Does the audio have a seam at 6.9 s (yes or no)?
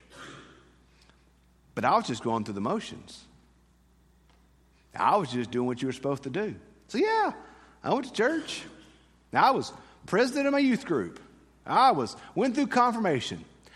no